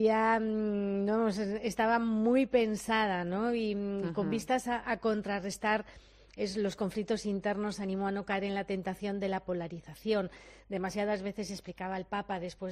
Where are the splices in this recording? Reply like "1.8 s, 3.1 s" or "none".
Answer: none